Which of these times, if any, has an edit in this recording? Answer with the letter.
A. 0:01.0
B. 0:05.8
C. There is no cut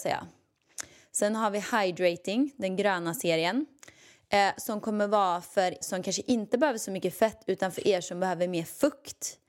B